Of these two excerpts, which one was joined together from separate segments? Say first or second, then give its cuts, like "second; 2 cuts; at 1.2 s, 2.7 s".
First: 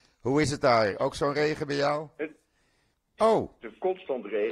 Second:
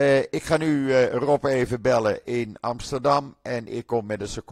first; 2 cuts; at 1.0 s, 3.2 s